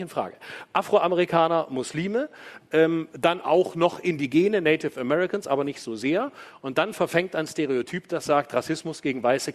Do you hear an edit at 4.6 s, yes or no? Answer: no